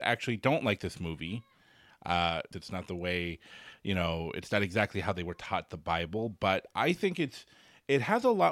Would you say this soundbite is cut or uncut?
cut